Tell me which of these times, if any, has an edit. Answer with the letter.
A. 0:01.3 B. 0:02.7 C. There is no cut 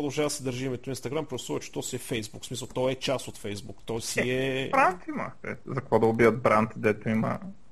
C